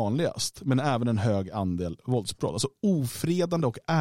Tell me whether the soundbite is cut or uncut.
uncut